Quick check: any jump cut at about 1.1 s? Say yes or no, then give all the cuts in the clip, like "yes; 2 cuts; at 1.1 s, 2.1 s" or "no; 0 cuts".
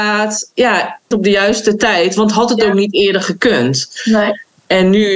yes; 1 cut; at 1.1 s